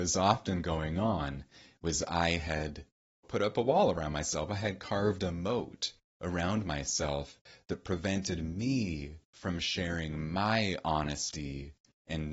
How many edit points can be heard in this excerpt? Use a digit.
2